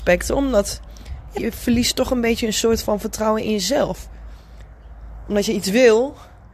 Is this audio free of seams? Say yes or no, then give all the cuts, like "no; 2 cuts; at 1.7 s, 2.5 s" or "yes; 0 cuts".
no; 1 cut; at 1.4 s